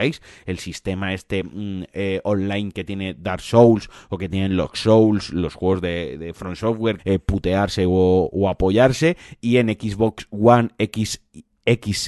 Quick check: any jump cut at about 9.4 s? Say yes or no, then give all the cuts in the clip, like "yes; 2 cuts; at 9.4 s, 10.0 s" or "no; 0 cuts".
no; 1 cut; at 7.0 s